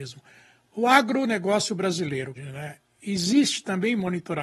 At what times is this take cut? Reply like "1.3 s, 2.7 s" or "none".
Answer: 2.4 s